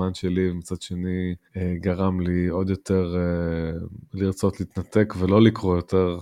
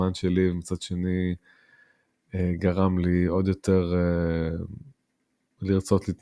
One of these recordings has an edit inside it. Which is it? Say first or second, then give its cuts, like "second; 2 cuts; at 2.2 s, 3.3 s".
first; 2 cuts; at 1.5 s, 4.0 s